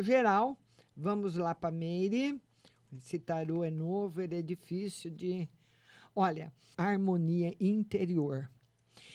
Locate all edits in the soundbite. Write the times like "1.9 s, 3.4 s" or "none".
2.9 s, 6.7 s